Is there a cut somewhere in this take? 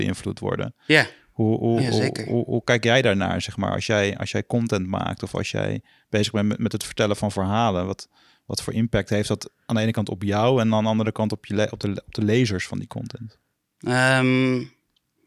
no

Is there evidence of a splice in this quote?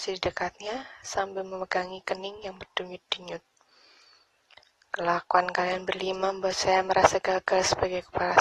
no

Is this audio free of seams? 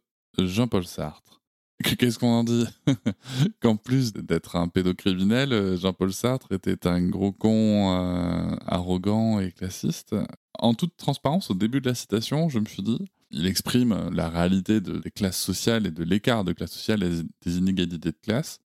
no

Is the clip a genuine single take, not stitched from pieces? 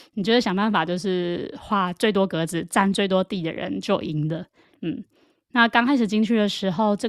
no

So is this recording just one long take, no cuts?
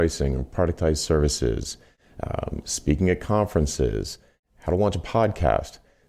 no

